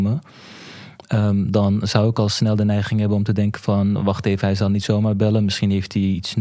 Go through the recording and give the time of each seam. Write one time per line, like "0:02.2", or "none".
none